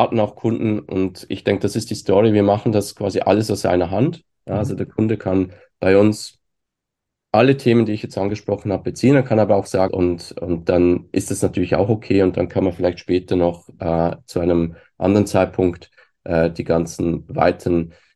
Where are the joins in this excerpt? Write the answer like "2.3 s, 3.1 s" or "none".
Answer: 9.9 s